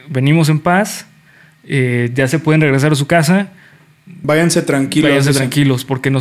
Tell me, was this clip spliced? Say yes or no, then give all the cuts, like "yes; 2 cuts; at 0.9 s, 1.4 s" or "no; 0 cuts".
no; 0 cuts